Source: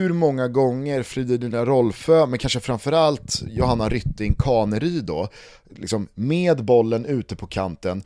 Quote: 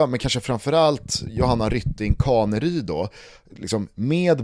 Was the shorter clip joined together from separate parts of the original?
no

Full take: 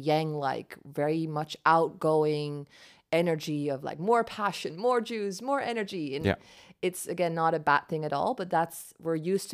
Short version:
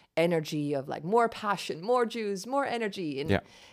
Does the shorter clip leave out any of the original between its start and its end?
no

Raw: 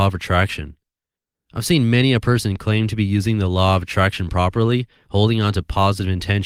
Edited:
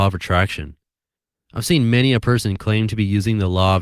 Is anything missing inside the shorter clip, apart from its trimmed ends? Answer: no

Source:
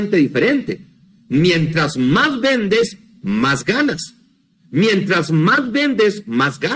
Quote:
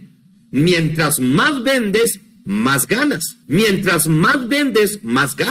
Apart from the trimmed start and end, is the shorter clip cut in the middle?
yes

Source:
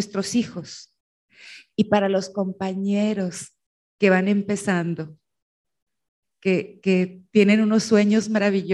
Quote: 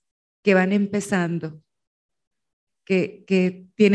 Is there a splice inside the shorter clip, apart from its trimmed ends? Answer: no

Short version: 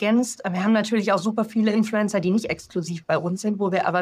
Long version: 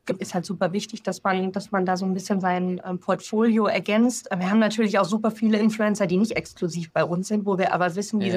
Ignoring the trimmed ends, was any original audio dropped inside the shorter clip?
no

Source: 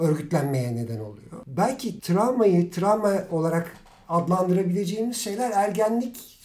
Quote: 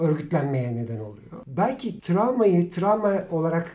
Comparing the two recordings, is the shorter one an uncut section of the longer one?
yes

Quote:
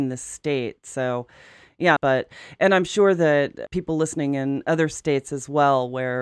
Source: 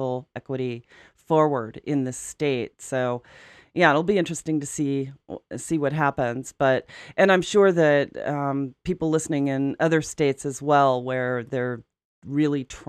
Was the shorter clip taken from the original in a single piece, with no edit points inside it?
no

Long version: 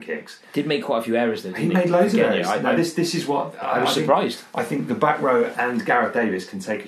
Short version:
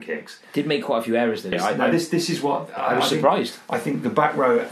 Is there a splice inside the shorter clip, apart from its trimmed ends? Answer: yes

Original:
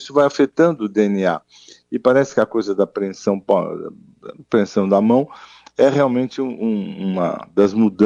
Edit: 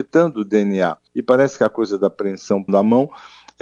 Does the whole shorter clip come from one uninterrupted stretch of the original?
no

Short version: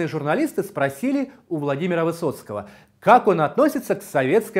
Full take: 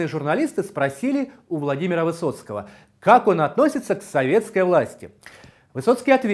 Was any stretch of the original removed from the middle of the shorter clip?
no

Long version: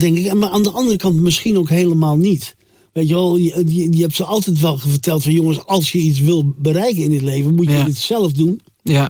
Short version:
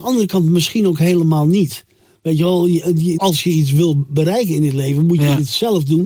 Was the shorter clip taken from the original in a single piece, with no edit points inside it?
no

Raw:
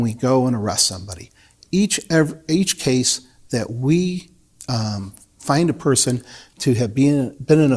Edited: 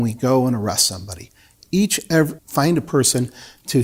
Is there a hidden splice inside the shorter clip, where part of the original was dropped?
yes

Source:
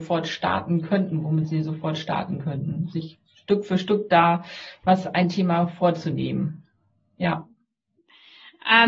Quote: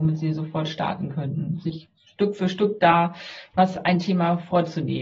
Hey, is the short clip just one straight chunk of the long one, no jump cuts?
yes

